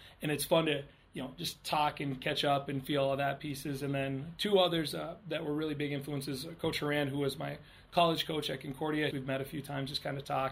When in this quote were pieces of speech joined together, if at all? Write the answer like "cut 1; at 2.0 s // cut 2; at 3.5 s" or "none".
cut 1; at 9.1 s